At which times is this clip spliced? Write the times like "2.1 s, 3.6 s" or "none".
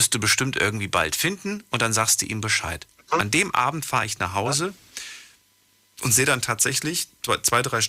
none